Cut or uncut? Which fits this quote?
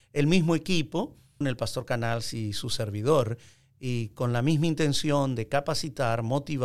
cut